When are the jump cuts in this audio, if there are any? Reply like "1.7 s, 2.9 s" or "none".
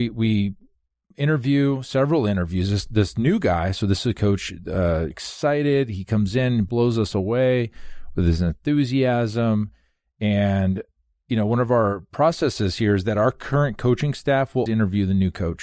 5.1 s, 14.7 s